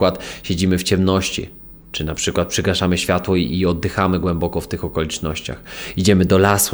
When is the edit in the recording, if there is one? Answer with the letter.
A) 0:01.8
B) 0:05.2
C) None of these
C